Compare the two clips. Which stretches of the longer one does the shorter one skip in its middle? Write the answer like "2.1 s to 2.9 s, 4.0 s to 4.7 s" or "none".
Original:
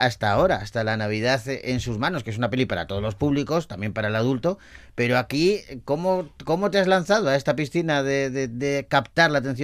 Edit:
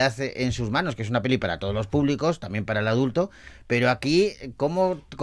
none